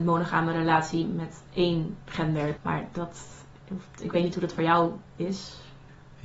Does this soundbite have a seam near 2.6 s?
yes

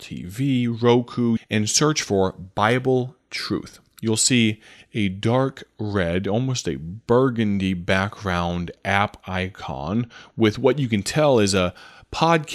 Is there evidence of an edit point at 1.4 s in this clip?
yes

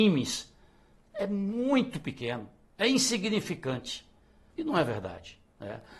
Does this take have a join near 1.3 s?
no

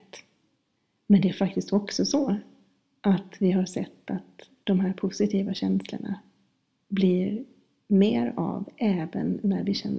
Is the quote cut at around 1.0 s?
no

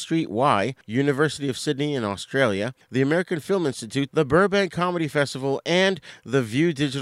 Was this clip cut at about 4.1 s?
yes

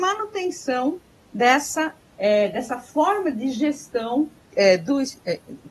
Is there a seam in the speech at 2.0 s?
yes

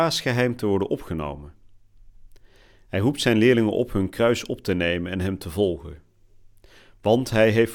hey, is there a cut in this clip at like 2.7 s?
no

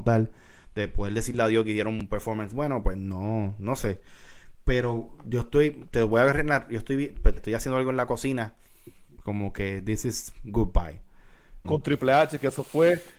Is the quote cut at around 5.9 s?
no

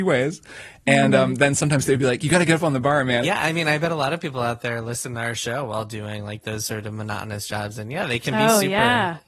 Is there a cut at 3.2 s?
yes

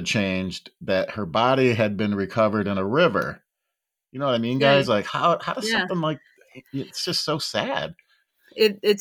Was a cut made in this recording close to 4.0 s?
yes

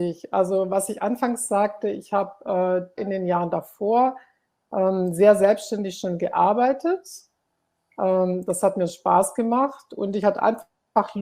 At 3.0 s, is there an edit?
yes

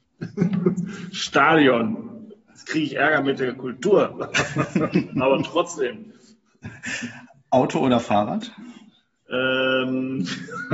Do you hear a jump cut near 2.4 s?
no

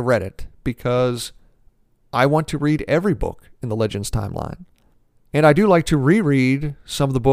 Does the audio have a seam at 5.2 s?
no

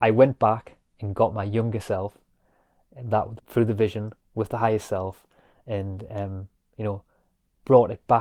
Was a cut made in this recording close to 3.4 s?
yes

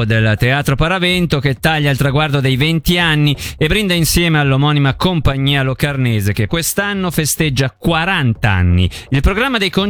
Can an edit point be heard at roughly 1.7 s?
no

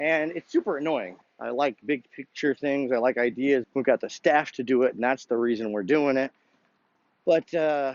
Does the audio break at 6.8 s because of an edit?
no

